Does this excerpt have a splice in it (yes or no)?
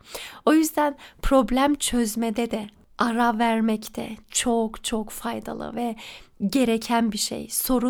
no